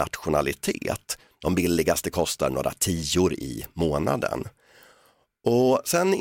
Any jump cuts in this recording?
yes; 1 cut; at 1.3 s

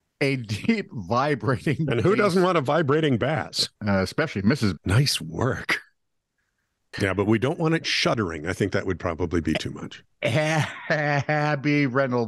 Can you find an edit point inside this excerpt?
yes; 3 cuts; at 3.8 s, 4.8 s, 6.9 s

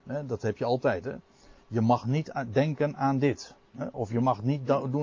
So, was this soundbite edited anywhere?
no; 0 cuts

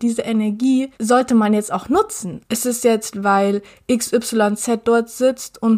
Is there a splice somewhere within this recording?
yes; 2 cuts; at 0.9 s, 2.4 s

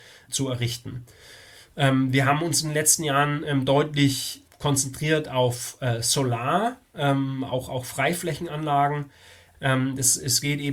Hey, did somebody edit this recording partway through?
yes; 1 cut; at 9.5 s

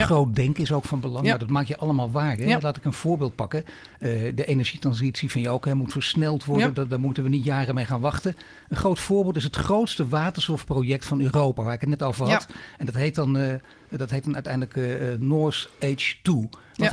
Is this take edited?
no; 0 cuts

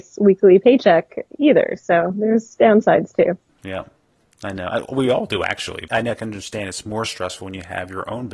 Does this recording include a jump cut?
yes; 2 cuts; at 3.5 s, 5.9 s

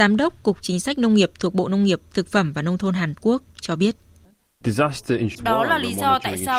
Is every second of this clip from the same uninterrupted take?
no; 1 cut; at 5.3 s

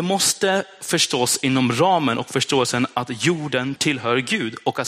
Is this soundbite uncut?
no; 1 cut; at 3.8 s

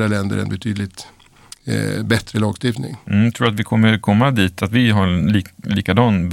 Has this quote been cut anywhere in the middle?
no; 0 cuts

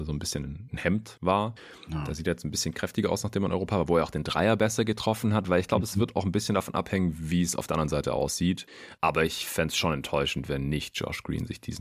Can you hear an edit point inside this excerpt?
no; 0 cuts

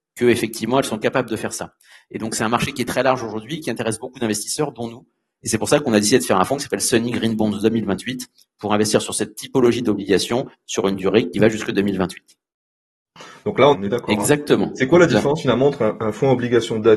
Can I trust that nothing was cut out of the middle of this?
no; 1 cut; at 13.7 s

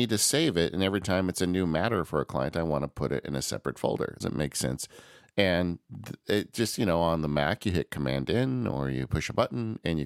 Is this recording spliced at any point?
yes; 1 cut; at 4.2 s

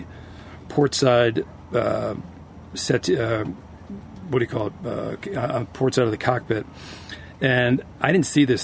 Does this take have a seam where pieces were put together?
no; 0 cuts

